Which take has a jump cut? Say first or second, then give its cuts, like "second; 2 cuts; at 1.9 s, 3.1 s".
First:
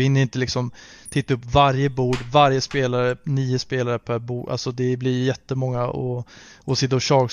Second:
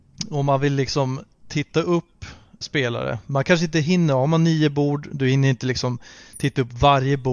second; 1 cut; at 2.6 s